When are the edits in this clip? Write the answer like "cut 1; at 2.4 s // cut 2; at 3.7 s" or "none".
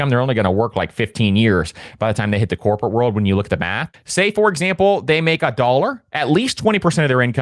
cut 1; at 3.9 s